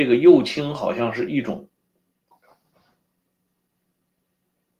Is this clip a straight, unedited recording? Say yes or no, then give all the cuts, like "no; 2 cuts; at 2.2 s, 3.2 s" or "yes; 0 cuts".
no; 1 cut; at 2.3 s